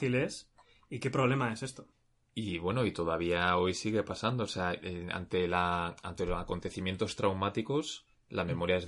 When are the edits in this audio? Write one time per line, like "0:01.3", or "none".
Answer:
none